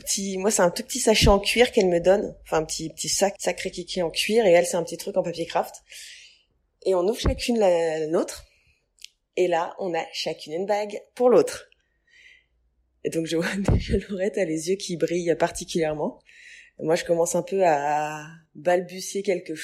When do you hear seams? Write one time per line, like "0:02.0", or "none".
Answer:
0:03.4